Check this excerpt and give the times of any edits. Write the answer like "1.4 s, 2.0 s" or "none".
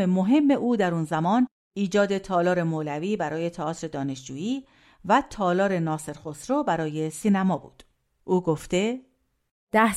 none